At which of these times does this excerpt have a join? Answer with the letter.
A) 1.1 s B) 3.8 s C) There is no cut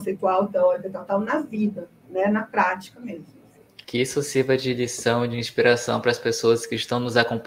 B